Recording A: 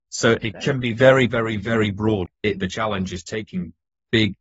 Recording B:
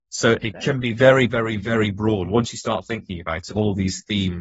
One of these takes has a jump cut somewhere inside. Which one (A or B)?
A